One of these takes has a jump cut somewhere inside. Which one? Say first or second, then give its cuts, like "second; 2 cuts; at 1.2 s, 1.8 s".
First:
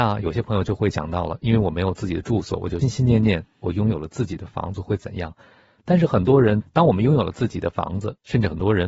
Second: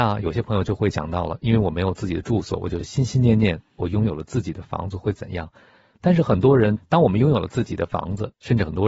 first; 1 cut; at 2.8 s